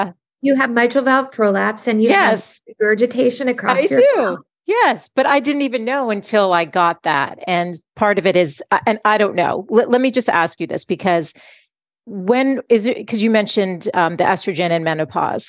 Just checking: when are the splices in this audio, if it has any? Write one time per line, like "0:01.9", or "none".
none